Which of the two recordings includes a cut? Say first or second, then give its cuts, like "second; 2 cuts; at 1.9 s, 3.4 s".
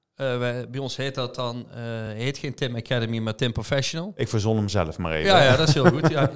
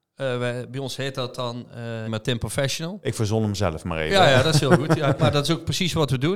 second; 2 cuts; at 2.1 s, 5.2 s